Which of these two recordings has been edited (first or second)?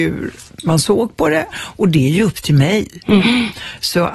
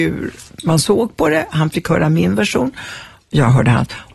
first